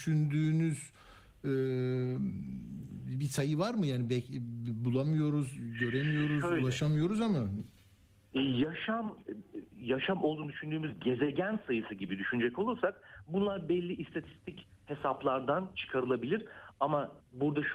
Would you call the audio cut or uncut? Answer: uncut